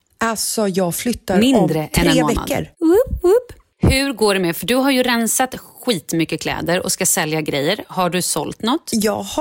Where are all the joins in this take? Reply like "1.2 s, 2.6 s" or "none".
2.7 s

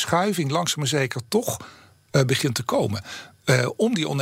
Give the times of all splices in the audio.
none

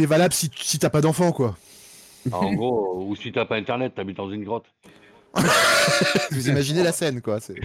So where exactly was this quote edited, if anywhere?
5.3 s

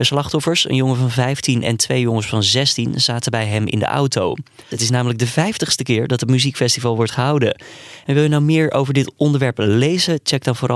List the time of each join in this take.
4.7 s, 8.0 s

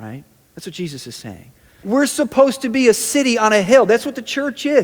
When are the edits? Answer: 1.8 s

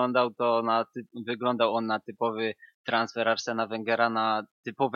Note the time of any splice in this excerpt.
none

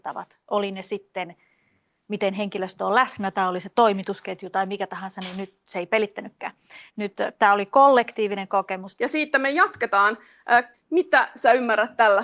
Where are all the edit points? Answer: 6.9 s, 9.0 s, 10.7 s

